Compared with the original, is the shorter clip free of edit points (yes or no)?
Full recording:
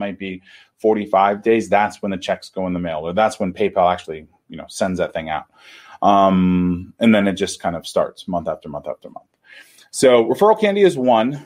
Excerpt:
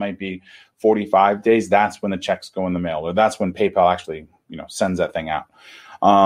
yes